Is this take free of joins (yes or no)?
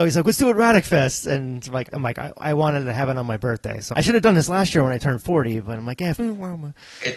no